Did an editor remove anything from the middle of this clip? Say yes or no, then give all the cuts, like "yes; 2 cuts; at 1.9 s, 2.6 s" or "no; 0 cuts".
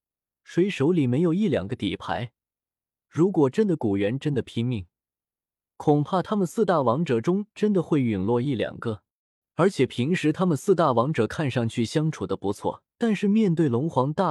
yes; 1 cut; at 12.9 s